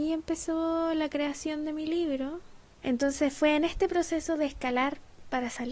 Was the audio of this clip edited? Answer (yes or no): yes